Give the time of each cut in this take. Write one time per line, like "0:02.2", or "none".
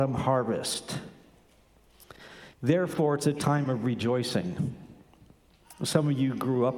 0:02.5